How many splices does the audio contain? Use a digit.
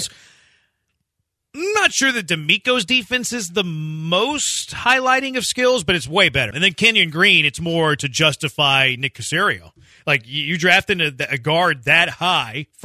1